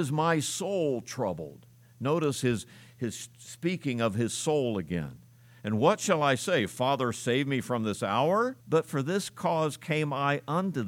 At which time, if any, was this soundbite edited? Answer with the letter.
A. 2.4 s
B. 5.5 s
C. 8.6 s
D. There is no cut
C